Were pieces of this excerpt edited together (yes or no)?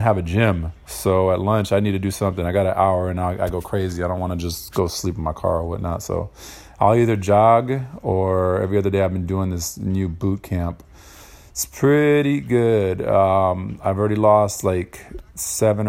no